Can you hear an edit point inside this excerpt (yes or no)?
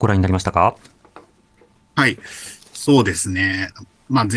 no